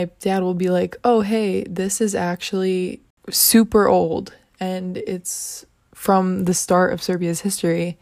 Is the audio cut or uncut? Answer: uncut